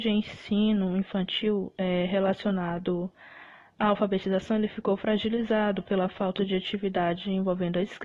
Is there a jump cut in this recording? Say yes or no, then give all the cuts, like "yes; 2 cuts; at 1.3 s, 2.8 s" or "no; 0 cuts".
no; 0 cuts